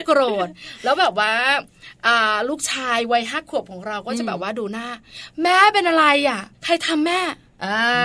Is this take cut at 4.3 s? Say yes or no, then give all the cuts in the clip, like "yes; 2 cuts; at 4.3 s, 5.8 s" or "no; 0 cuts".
no; 1 cut; at 6.5 s